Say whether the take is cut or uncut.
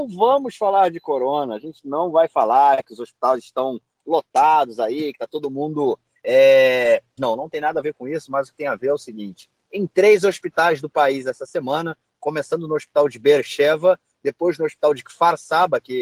cut